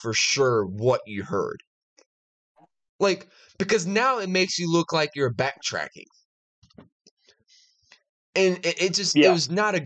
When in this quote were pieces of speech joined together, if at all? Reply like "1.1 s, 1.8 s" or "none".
none